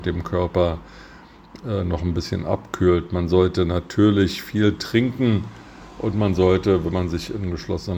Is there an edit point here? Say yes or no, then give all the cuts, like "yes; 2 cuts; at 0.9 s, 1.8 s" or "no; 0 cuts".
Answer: no; 0 cuts